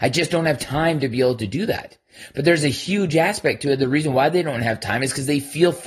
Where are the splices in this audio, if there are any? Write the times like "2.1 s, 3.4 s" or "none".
none